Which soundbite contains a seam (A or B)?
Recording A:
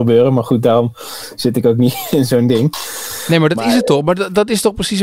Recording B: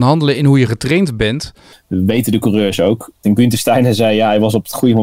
B